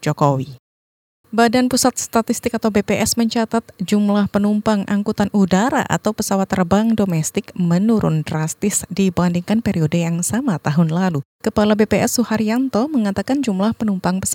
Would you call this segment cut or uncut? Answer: cut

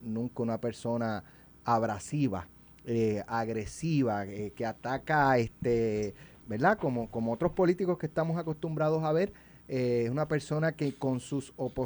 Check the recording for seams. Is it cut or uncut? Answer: cut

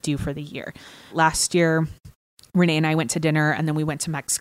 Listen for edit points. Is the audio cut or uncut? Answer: cut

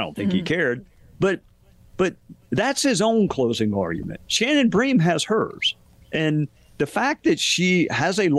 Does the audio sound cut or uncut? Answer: uncut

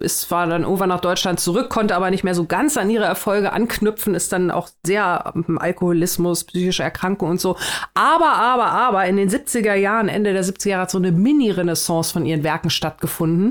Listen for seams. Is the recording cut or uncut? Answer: uncut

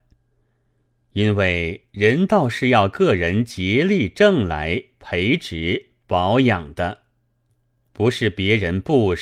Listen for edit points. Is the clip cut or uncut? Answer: uncut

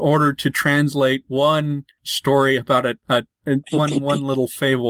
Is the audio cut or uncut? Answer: cut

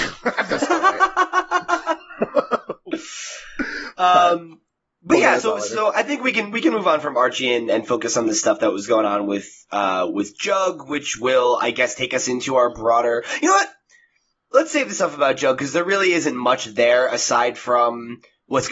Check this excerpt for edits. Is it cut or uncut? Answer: uncut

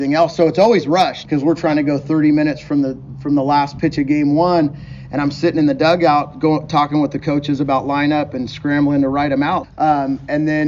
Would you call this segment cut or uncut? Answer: cut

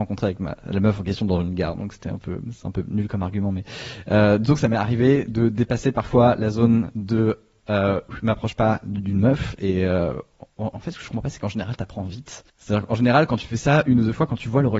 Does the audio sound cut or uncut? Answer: cut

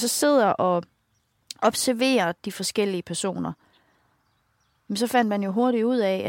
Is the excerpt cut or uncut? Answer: uncut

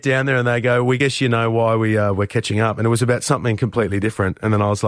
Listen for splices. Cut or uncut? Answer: uncut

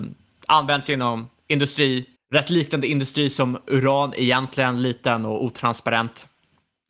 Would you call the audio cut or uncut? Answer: cut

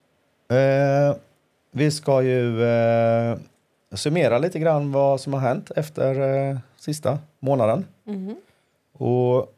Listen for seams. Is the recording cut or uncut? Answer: uncut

